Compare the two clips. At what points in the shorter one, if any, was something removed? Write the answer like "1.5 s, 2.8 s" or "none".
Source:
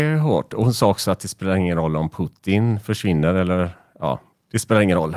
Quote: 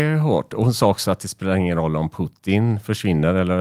none